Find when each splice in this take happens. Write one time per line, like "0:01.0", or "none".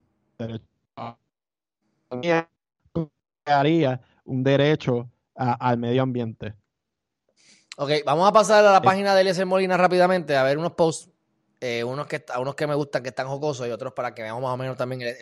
none